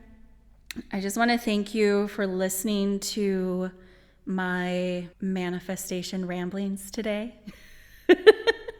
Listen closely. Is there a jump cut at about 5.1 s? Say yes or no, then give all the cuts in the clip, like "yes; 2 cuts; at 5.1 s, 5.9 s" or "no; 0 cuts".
yes; 1 cut; at 5.1 s